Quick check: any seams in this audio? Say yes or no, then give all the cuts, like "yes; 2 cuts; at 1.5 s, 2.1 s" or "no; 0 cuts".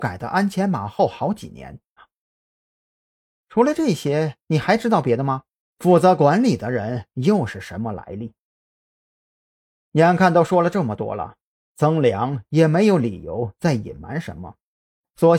yes; 2 cuts; at 2.0 s, 5.6 s